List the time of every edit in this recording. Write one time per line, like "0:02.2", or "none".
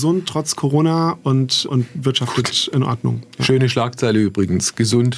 0:01.7